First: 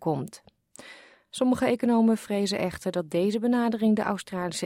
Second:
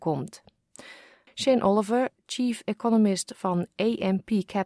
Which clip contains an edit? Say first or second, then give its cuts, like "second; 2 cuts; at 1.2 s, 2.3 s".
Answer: second; 1 cut; at 1.3 s